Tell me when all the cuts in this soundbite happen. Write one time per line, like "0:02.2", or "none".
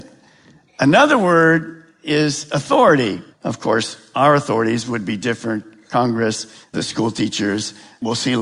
0:03.3
0:06.6